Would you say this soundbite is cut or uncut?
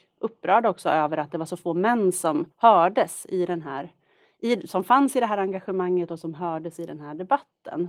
cut